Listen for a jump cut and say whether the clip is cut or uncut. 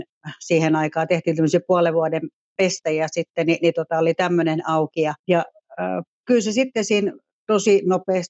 cut